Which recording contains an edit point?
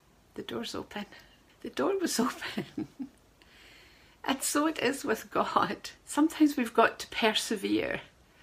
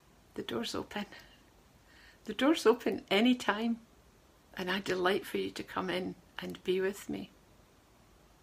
first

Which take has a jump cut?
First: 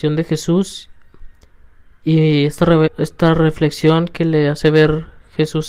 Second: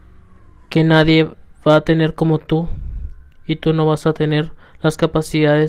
first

